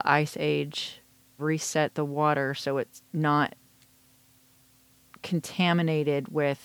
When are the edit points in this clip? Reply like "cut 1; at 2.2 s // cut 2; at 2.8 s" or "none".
cut 1; at 1.4 s

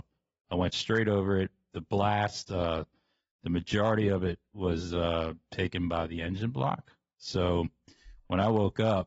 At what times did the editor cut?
none

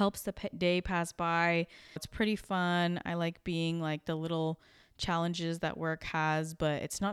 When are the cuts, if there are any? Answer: cut 1; at 2.0 s

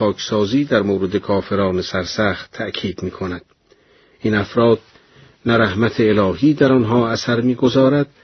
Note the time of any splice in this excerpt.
none

